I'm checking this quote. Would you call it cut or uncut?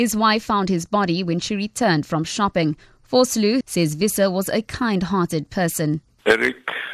cut